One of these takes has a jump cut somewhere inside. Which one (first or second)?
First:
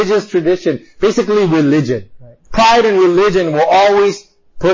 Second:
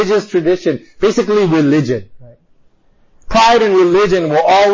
first